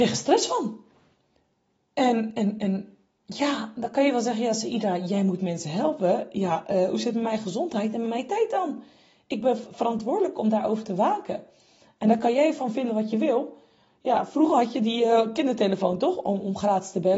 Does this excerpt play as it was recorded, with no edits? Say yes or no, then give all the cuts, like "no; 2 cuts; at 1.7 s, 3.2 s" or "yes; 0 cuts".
yes; 0 cuts